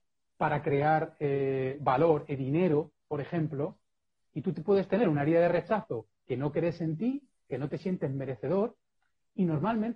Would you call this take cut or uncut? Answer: uncut